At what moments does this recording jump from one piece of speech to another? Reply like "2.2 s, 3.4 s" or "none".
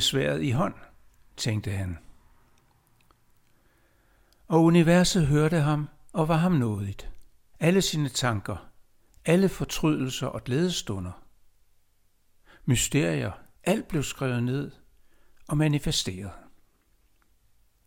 7.5 s, 13.6 s